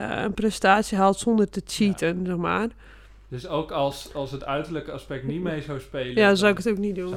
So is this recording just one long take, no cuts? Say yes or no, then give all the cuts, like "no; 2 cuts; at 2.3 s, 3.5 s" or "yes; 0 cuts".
yes; 0 cuts